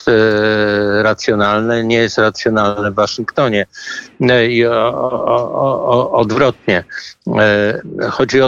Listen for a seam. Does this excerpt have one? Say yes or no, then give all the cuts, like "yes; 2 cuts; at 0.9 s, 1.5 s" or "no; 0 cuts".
no; 0 cuts